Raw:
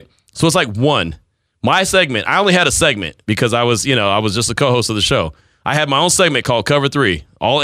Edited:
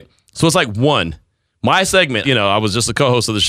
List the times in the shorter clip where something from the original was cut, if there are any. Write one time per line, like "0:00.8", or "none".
0:02.2

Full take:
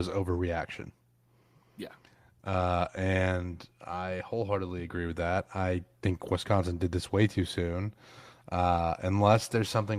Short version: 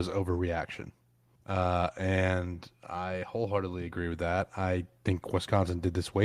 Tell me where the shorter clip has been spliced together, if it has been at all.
0:01.4

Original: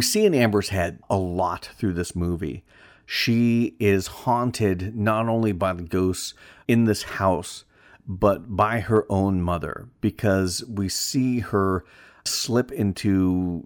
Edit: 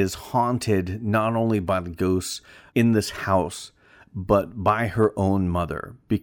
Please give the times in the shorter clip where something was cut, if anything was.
none

